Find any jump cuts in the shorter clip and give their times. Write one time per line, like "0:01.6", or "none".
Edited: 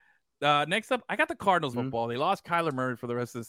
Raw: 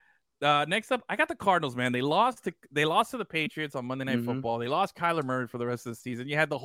0:01.7